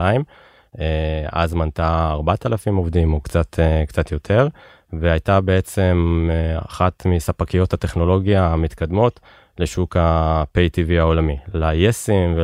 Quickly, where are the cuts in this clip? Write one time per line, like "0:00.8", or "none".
none